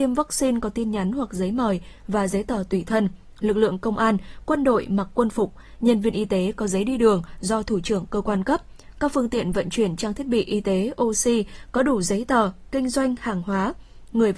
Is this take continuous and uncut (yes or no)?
yes